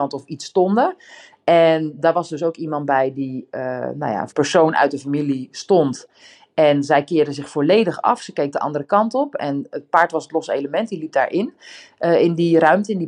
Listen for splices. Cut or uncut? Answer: cut